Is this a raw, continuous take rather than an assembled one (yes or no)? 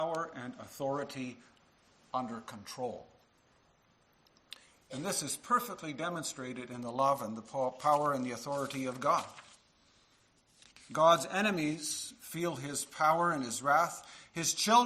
yes